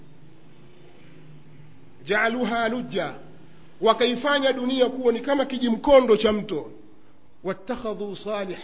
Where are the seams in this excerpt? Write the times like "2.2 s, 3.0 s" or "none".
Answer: none